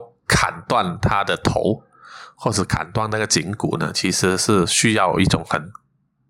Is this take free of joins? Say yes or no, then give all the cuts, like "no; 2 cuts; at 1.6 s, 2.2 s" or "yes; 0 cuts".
yes; 0 cuts